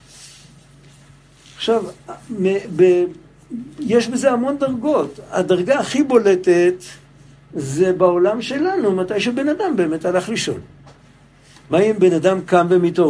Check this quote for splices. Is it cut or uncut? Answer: uncut